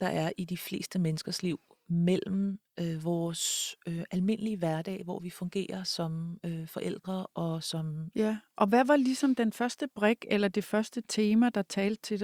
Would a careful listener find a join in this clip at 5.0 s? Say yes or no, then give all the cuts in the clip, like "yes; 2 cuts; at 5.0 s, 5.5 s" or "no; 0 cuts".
no; 1 cut; at 8.1 s